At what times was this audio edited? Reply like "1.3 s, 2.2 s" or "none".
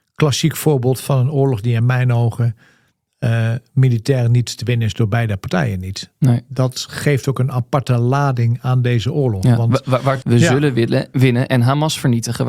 10.2 s